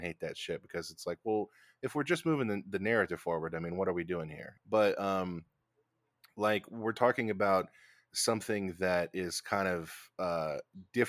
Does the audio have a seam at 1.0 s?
no; 1 cut; at 4.6 s

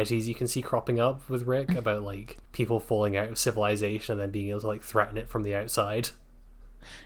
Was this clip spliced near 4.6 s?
no; 1 cut; at 2.4 s

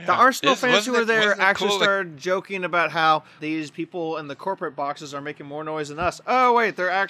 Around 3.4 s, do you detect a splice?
yes; 1 cut; at 3.4 s

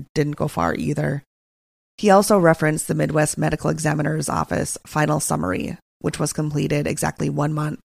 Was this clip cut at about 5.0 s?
no; 1 cut; at 1.9 s

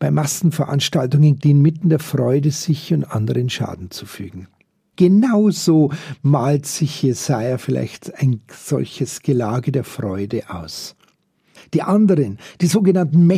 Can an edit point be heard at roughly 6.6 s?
no; 3 cuts; at 1.4 s, 4.9 s, 11.6 s

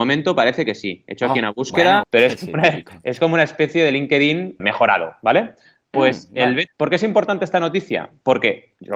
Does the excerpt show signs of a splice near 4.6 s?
yes; 3 cuts; at 2.0 s, 4.6 s, 6.7 s

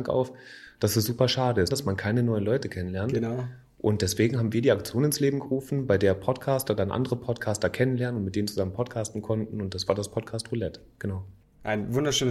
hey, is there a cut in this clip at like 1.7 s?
yes; 1 cut; at 1.7 s

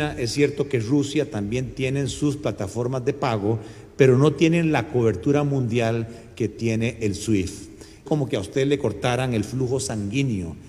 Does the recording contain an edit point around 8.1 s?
yes; 1 cut; at 8.1 s

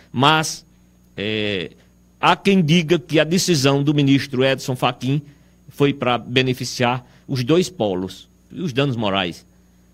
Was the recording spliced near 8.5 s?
yes; 1 cut; at 8.5 s

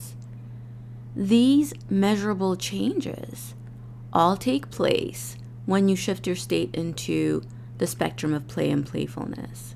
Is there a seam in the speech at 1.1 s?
no; 0 cuts

